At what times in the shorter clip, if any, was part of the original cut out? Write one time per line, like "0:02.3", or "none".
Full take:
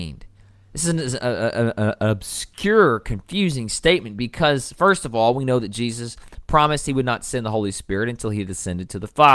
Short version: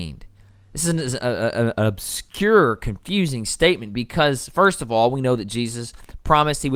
0:01.7